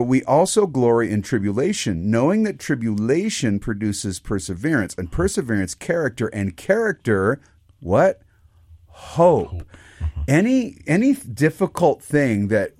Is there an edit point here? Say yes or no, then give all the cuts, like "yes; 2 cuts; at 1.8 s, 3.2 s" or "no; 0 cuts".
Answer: no; 0 cuts